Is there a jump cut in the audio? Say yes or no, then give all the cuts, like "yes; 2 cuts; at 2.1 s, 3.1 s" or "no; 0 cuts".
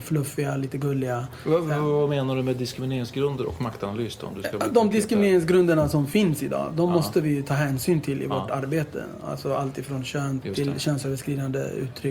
yes; 1 cut; at 10.4 s